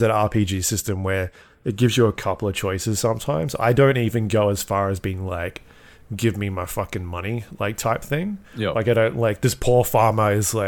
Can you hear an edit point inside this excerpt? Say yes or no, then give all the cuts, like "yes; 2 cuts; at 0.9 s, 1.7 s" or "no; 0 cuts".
no; 0 cuts